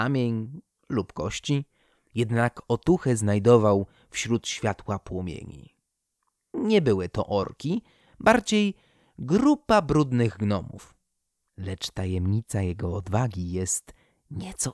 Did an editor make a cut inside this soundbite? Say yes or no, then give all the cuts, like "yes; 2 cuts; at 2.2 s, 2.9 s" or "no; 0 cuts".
yes; 2 cuts; at 6.5 s, 11.5 s